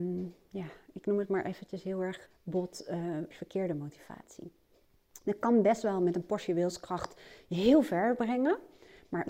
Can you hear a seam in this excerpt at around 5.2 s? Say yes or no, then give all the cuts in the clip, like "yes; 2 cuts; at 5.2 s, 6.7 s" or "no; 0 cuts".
no; 2 cuts; at 2.3 s, 3.3 s